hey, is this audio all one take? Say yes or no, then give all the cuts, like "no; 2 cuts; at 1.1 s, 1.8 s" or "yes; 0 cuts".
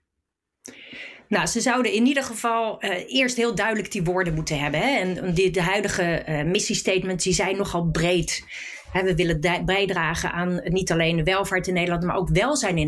yes; 0 cuts